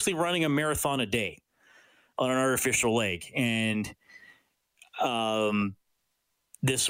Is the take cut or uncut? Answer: uncut